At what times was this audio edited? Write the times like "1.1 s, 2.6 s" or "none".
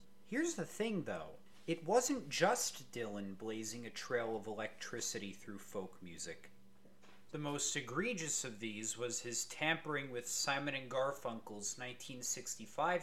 7.3 s